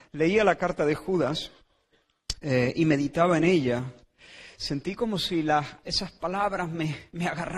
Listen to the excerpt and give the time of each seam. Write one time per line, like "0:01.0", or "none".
0:05.8